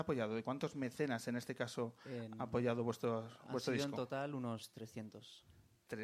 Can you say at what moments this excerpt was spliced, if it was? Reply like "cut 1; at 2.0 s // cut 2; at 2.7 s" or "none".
none